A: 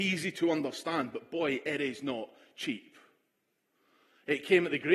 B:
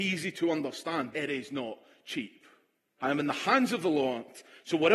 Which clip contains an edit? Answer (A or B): B